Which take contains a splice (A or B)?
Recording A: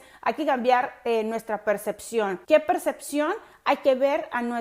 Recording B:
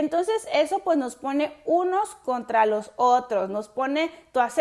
A